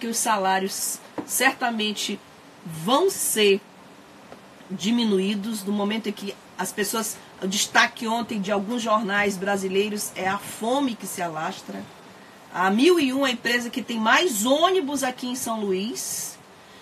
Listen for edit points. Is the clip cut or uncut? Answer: uncut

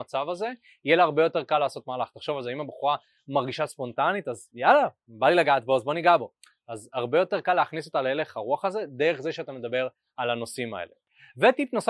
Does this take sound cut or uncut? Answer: uncut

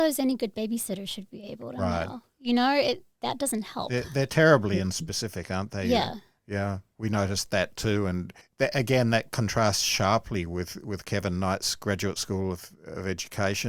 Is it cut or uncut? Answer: uncut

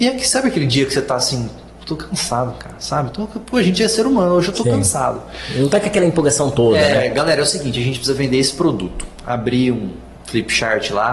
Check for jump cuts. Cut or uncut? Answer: uncut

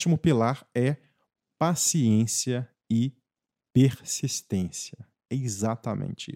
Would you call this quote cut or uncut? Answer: uncut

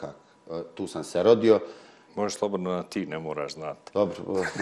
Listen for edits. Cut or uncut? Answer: cut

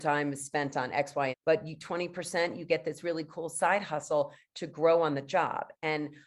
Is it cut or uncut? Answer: cut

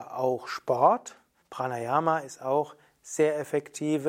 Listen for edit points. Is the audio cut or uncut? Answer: cut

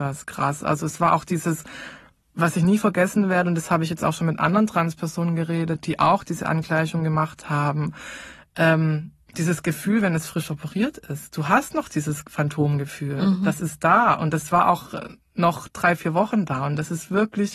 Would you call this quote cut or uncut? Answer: uncut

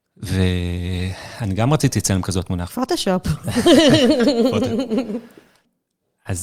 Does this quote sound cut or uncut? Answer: cut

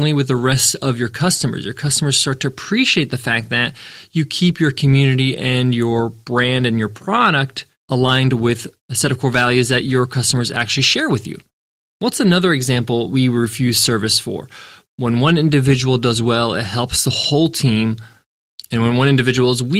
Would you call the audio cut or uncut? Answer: cut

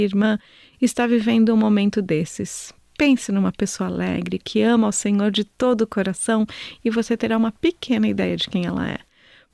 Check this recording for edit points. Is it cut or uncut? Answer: cut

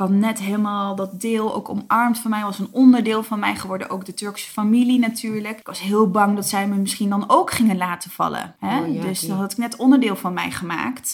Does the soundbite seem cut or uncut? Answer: uncut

